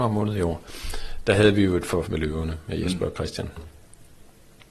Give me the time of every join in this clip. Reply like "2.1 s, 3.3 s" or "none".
2.0 s